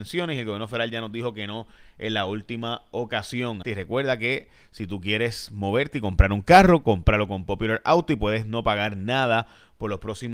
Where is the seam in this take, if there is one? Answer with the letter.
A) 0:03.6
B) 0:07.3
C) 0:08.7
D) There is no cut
A